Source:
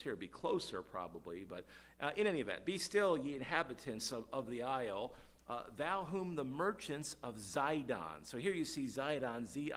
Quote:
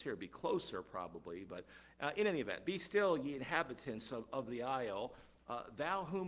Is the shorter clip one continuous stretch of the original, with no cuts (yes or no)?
yes